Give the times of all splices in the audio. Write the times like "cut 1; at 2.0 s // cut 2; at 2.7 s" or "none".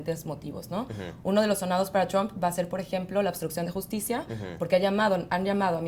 none